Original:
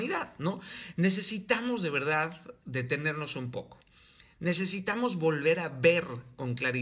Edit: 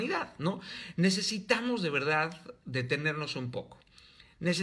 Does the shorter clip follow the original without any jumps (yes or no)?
yes